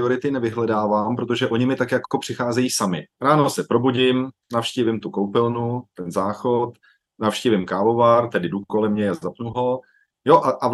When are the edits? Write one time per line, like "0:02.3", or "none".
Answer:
0:03.1